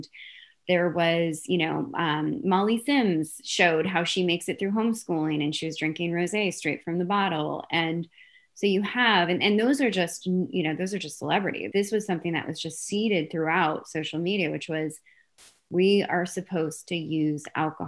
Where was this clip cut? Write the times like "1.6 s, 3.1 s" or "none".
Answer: 11.7 s